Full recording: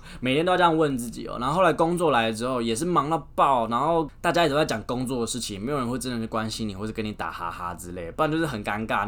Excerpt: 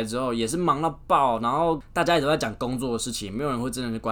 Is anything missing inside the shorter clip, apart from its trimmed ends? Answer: no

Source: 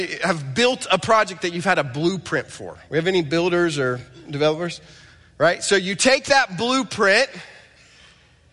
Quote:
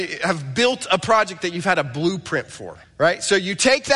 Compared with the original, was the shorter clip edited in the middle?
yes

